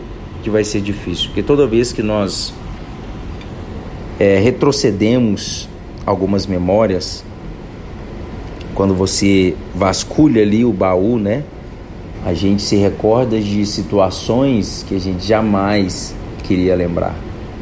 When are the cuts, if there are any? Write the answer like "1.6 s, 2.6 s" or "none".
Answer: 12.1 s